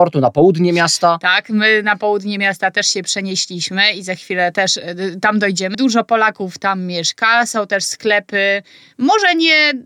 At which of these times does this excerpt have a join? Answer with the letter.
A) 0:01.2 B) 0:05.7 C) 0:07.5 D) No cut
B